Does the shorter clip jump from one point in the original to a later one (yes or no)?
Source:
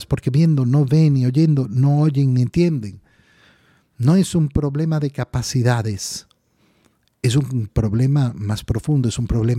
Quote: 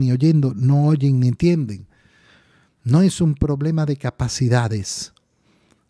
no